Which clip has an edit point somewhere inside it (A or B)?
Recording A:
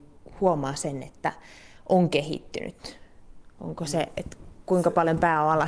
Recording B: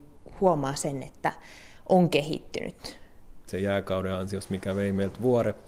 B